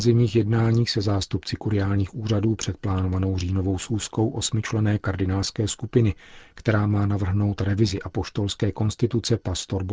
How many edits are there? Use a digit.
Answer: 0